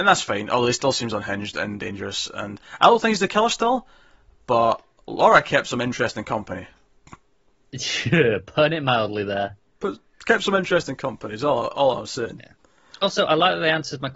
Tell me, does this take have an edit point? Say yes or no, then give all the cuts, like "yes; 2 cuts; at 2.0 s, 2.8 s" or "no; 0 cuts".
no; 0 cuts